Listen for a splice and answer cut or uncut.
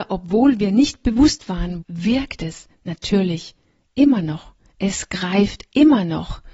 cut